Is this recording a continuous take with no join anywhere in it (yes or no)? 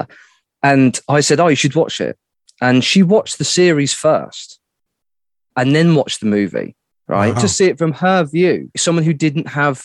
no